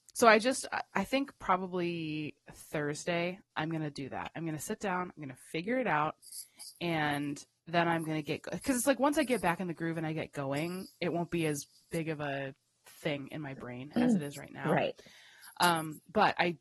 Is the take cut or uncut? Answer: uncut